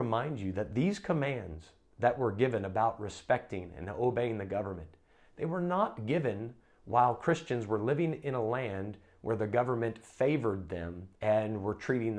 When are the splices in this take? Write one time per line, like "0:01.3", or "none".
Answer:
0:11.1